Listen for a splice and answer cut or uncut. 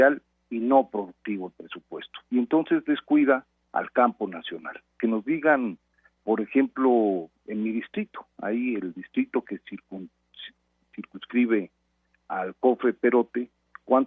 uncut